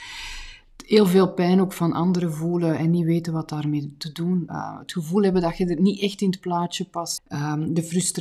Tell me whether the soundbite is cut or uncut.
cut